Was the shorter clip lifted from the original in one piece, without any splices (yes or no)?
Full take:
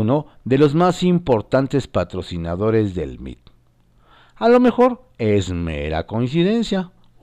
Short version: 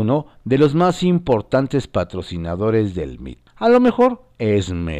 no